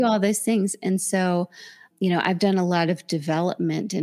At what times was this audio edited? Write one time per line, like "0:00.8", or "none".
0:01.9